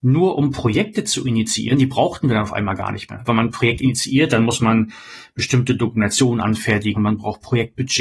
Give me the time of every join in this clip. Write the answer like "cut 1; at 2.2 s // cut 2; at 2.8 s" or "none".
cut 1; at 3.3 s // cut 2; at 6.9 s